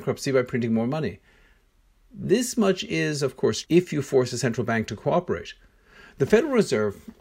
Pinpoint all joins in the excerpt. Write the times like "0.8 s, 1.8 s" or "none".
3.6 s